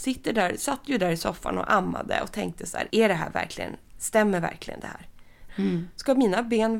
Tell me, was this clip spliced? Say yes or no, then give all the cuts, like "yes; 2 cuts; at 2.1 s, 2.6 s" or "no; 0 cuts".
yes; 2 cuts; at 2.9 s, 5.5 s